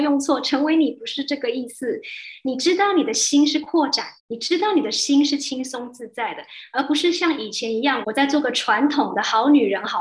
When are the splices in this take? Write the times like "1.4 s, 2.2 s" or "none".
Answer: 2.4 s, 4.2 s, 8.0 s